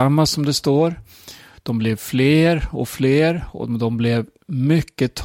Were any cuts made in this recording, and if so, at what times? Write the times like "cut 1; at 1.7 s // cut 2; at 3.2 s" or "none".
none